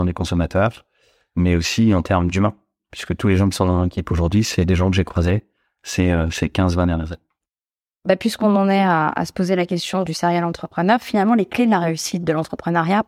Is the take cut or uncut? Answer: uncut